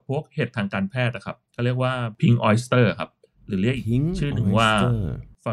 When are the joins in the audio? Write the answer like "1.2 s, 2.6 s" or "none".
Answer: 1.4 s